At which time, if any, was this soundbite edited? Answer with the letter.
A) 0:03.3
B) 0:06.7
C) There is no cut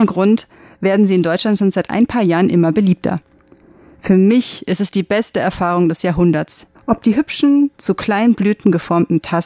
B